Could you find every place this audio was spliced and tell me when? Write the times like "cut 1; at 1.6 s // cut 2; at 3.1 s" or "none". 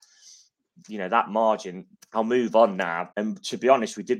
cut 1; at 2.0 s // cut 2; at 3.1 s